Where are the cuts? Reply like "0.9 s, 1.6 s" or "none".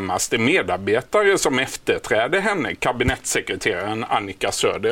none